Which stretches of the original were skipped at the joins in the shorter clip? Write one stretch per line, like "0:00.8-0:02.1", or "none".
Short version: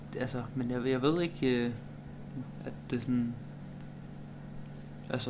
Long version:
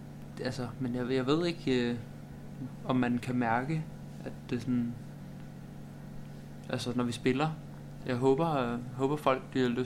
0:02.8-0:04.2